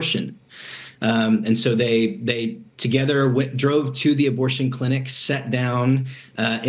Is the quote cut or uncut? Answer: uncut